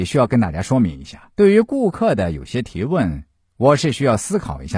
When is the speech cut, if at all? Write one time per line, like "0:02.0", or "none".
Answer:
0:01.3